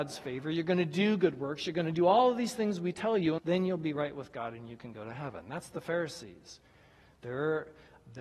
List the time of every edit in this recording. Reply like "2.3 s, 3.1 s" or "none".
3.4 s